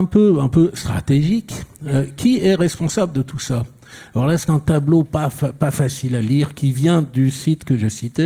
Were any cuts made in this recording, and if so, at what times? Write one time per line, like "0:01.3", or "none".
none